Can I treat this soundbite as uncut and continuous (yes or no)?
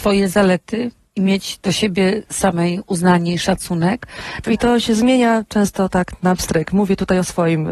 no